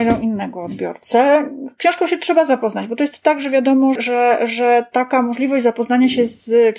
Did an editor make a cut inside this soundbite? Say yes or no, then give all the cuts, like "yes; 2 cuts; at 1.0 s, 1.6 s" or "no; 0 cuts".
yes; 1 cut; at 4.0 s